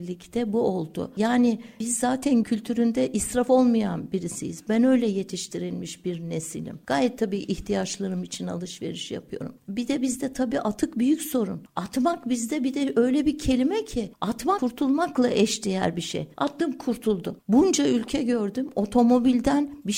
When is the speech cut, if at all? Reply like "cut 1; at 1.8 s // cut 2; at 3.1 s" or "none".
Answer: none